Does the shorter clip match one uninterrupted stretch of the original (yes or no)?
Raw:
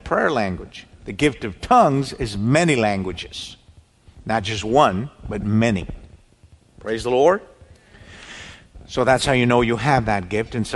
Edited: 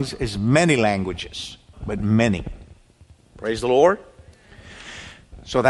no